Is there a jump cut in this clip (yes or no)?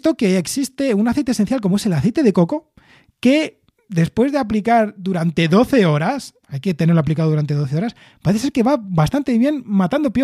yes